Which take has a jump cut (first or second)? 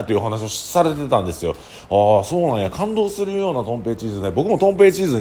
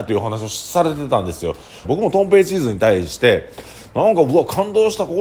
second